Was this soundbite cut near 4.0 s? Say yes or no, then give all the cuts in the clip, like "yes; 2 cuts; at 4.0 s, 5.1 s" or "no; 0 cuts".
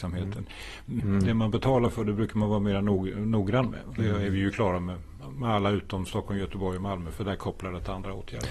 yes; 2 cuts; at 1.0 s, 4.0 s